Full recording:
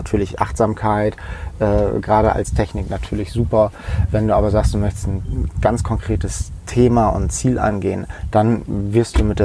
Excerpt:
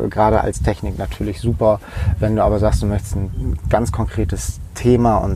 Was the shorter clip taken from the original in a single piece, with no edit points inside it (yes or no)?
yes